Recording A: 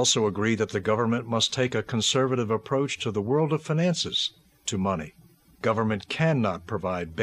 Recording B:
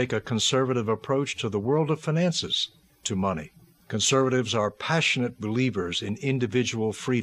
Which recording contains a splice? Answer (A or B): B